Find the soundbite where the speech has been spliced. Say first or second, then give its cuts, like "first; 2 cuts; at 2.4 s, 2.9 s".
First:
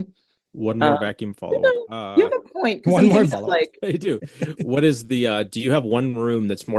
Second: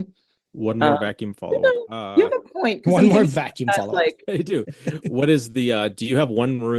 first; 1 cut; at 3.3 s